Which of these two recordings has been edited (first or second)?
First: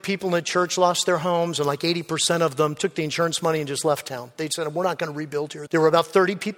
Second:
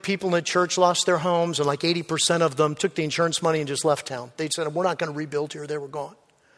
first